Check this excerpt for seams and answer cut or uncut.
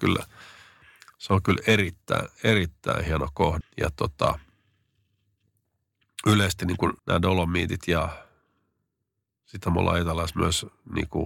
cut